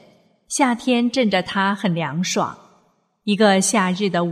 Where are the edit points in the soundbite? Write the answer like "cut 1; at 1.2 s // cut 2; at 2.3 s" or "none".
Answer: none